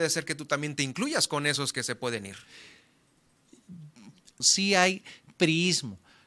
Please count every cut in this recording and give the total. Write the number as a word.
one